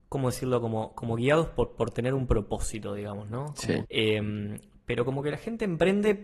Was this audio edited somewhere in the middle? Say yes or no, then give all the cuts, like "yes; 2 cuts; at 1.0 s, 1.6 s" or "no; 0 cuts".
yes; 1 cut; at 3.8 s